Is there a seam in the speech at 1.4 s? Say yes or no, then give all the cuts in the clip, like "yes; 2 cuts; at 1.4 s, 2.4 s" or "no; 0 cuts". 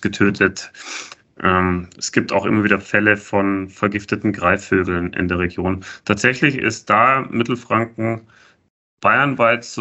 no; 0 cuts